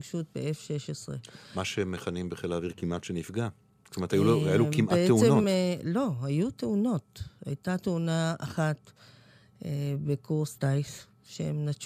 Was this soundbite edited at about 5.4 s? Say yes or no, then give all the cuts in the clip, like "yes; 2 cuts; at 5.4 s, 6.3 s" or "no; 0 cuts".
no; 0 cuts